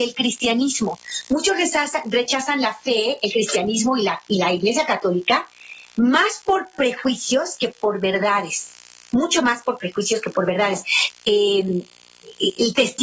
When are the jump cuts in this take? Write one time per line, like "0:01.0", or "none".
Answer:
0:11.1